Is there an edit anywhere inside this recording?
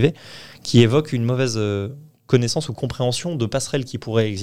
no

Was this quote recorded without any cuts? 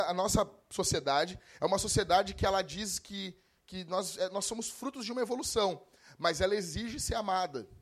yes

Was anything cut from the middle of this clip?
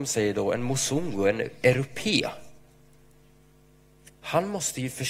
no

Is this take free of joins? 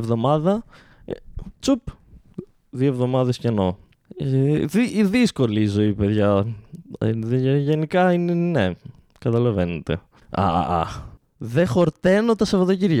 no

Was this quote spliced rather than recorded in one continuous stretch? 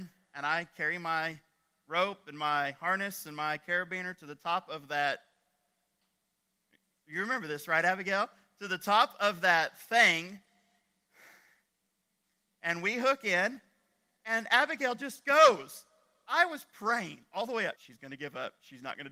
yes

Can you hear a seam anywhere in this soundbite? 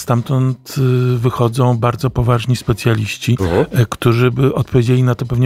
yes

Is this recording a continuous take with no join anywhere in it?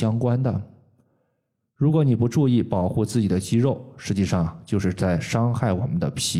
yes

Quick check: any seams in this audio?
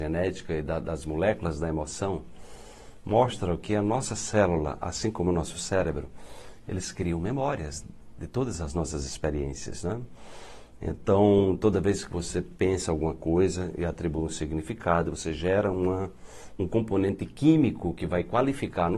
no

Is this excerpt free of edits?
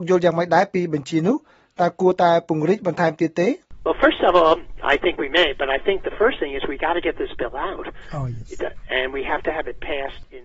yes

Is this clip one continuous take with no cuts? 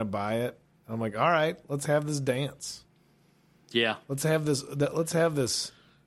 yes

